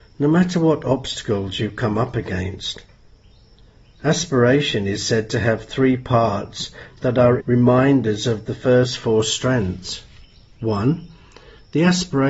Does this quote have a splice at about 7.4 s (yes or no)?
yes